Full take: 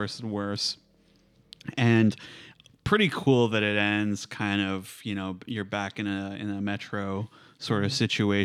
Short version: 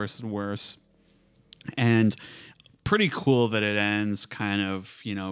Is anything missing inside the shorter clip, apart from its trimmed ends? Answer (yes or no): no